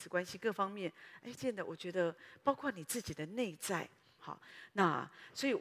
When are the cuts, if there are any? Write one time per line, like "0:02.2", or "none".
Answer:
0:01.4
0:04.2

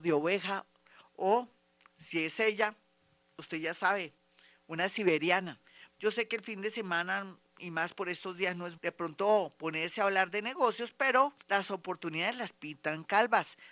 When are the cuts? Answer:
0:05.9
0:08.8
0:11.4

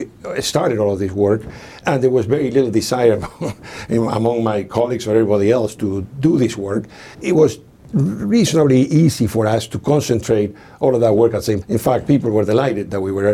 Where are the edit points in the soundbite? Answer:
0:07.1
0:11.6

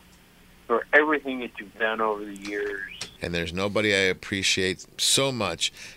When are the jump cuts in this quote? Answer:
0:03.2

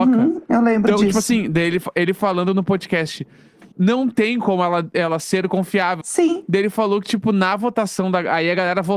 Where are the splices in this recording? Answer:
0:03.7
0:06.0

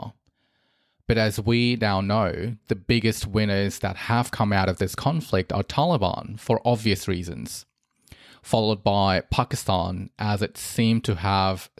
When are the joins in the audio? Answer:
none

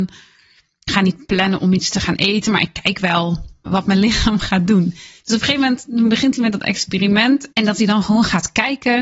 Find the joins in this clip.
0:03.7
0:07.5

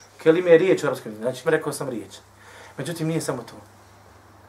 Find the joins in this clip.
0:01.4

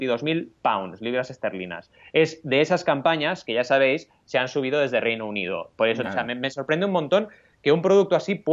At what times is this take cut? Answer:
0:06.0

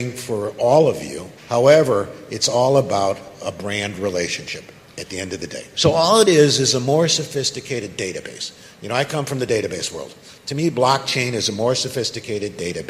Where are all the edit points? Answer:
0:01.4
0:05.7

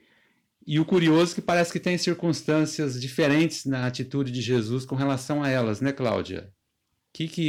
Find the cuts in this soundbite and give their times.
none

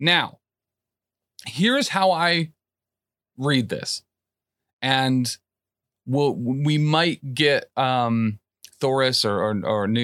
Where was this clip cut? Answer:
none

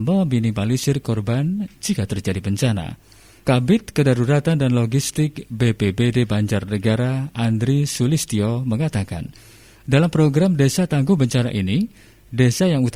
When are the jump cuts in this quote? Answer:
0:03.4

